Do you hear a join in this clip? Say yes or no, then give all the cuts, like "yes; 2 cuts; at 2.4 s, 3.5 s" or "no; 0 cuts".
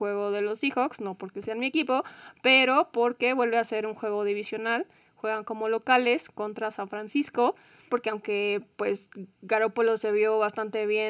yes; 1 cut; at 7.9 s